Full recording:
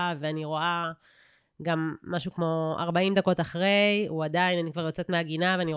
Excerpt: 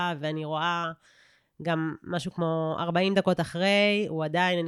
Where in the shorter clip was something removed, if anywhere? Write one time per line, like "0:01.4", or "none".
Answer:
none